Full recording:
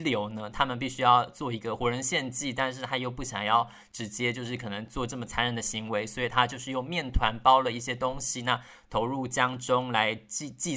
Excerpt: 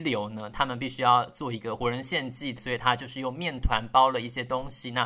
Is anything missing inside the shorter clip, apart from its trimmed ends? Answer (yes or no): yes